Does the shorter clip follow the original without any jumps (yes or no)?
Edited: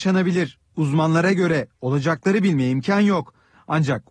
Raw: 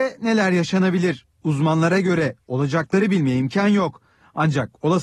yes